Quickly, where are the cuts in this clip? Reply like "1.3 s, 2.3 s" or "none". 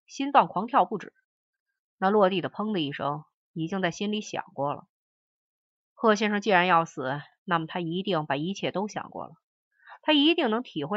none

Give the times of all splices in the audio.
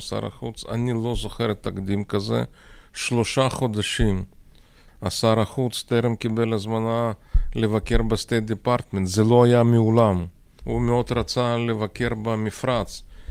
4.9 s, 10.6 s

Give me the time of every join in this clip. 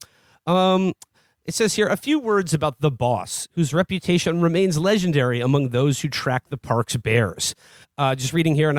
7.8 s

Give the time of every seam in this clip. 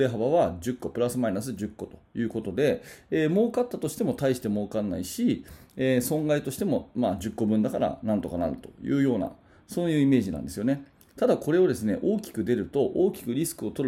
none

